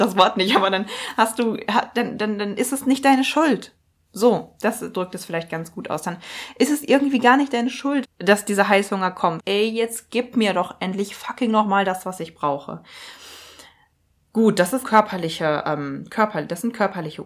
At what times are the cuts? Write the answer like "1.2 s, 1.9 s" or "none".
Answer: 8.0 s, 9.4 s, 14.8 s